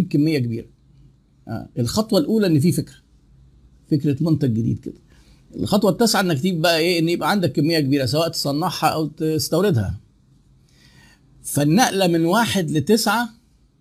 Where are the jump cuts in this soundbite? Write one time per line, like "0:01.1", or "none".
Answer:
none